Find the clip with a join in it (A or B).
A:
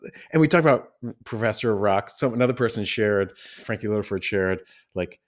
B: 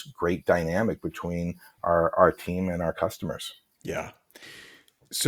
A